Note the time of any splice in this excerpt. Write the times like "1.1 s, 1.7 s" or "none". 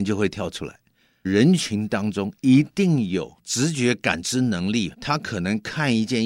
1.2 s, 3.4 s, 4.9 s